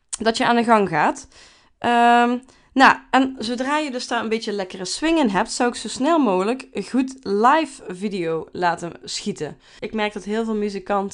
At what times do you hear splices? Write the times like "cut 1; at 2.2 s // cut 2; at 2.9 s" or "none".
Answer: cut 1; at 9.8 s